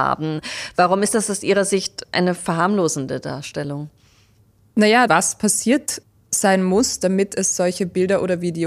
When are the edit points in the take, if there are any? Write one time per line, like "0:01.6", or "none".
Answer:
0:05.1